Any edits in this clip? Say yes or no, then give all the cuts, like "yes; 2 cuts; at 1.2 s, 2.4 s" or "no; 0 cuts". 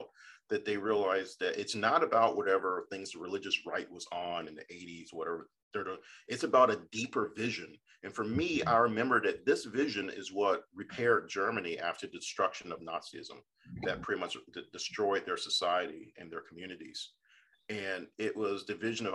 no; 0 cuts